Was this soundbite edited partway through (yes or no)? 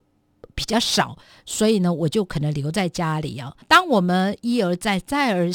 no